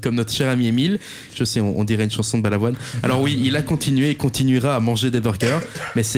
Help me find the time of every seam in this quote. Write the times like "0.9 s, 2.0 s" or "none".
1.3 s